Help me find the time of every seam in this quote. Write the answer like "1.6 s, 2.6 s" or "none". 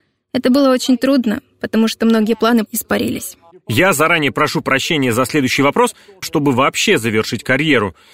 2.7 s, 6.2 s